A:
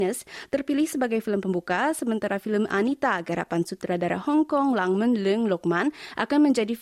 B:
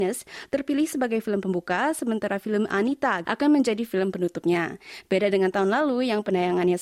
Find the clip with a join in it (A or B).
B